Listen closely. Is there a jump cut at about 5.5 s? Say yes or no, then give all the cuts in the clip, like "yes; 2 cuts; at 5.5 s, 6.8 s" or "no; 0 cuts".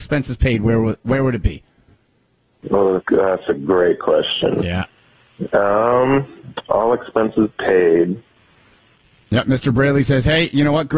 no; 1 cut; at 3.0 s